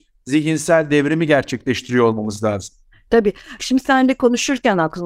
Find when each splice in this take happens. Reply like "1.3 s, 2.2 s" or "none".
3.6 s